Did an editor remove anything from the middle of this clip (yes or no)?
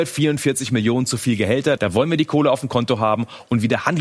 yes